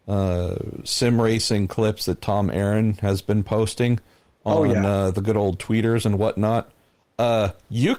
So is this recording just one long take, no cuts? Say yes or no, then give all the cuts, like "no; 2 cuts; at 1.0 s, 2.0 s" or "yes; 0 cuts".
yes; 0 cuts